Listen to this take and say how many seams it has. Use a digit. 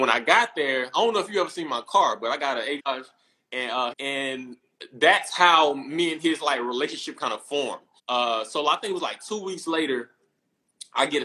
3